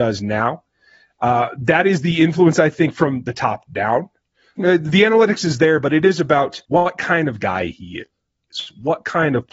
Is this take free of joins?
no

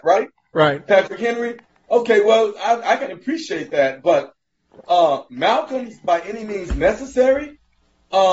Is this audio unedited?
yes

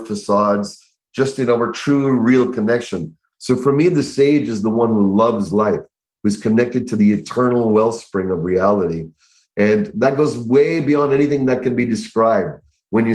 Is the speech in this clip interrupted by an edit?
no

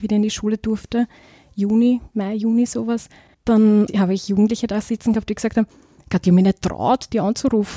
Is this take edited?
no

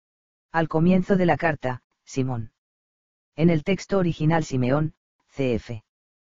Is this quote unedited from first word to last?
no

